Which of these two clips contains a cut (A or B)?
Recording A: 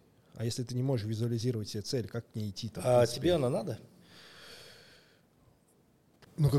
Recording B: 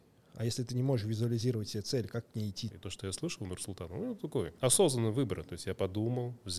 B